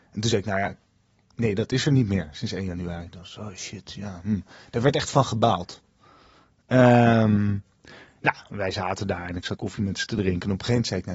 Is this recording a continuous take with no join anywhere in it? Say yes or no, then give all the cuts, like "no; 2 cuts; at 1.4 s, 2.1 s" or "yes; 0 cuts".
no; 1 cut; at 9.6 s